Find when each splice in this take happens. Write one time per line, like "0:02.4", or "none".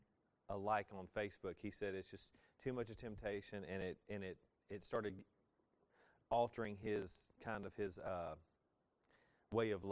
none